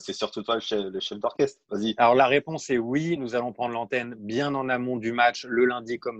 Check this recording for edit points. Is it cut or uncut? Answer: uncut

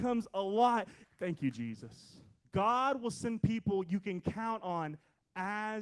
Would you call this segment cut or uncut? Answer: cut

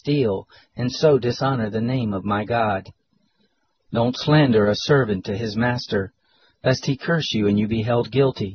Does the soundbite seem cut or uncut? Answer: uncut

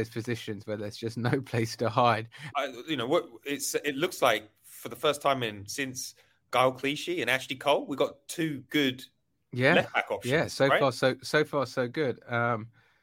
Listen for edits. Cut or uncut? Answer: cut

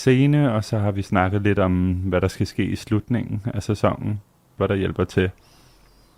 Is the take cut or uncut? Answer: cut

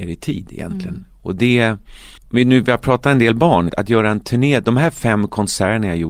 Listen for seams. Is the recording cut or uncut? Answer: cut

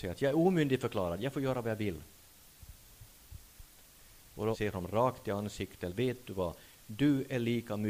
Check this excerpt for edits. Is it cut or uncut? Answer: cut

